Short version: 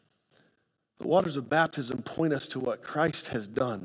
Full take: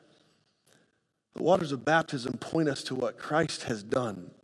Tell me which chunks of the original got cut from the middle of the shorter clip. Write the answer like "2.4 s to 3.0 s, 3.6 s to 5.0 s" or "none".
none

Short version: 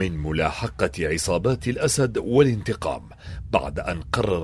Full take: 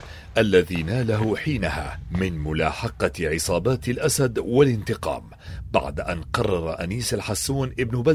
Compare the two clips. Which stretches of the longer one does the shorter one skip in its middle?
none

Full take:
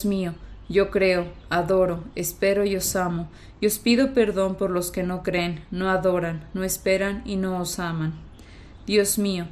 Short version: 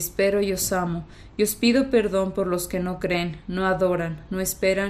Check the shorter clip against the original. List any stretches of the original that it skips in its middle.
none

